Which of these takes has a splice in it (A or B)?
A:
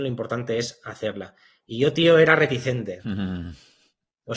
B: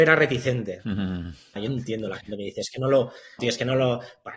B